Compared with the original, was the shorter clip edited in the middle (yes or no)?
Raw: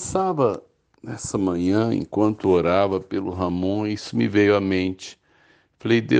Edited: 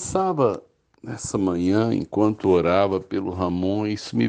no